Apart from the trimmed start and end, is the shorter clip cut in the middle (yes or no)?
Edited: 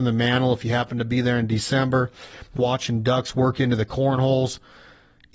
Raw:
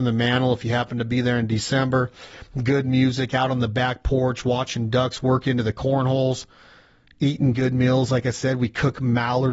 yes